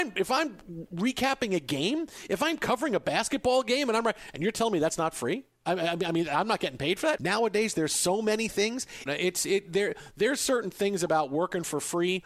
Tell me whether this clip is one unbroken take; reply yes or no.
no